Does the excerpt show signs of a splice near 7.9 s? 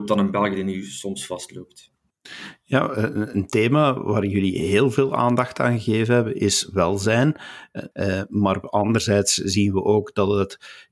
yes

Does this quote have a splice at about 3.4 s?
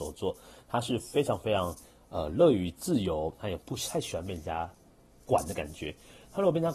yes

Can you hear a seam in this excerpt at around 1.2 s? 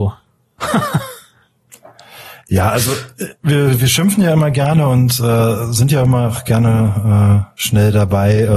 no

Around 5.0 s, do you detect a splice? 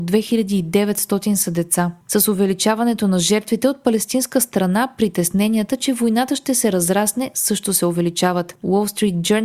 no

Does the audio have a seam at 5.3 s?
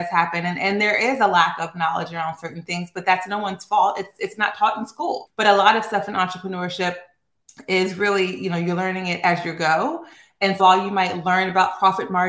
yes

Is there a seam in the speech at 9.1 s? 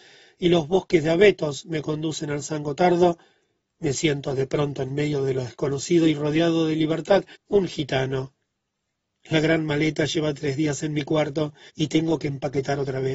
no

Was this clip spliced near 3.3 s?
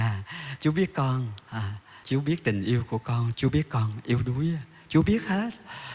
yes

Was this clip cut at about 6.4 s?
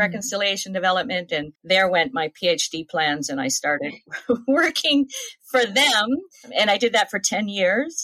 no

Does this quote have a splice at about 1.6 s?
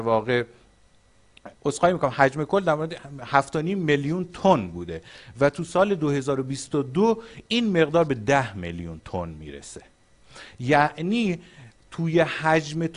yes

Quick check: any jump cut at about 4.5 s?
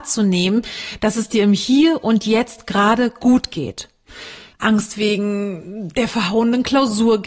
yes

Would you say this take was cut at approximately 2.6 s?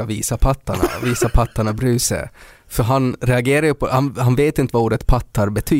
no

